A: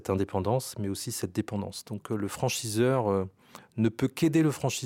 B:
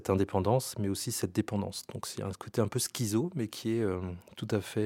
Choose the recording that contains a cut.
A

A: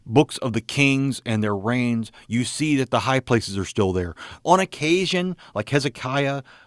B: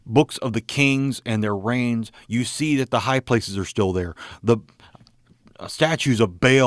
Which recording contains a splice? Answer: A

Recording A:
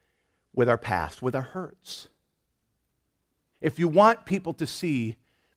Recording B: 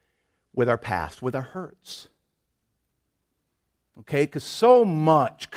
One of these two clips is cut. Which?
A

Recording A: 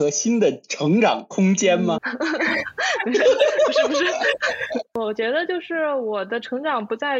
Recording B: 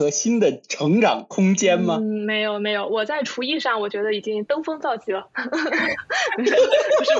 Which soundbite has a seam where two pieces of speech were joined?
A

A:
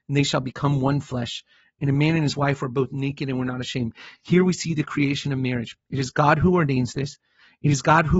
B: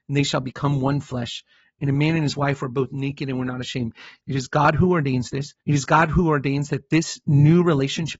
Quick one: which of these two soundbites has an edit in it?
B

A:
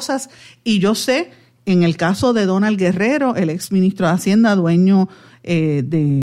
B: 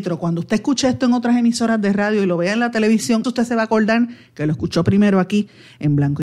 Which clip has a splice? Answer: B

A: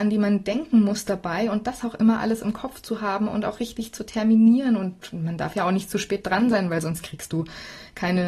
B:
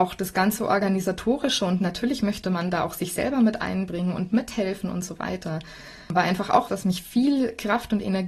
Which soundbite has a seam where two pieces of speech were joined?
B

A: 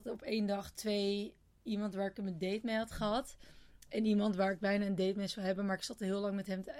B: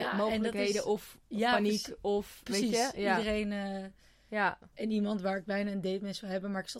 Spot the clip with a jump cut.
B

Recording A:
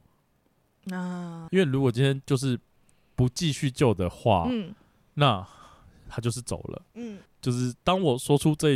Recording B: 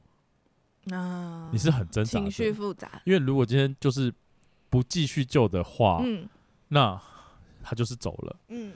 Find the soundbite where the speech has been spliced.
A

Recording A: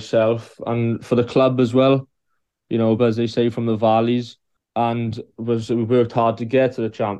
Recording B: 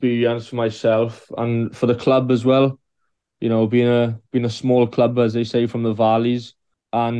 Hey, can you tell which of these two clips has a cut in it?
A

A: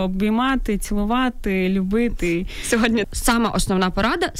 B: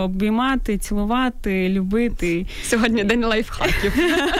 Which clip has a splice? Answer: A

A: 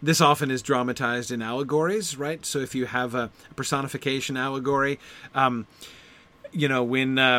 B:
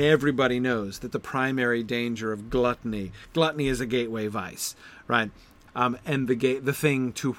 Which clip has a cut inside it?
B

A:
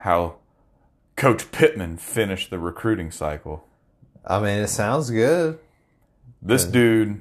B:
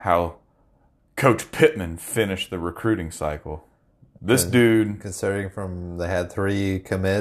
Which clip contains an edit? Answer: B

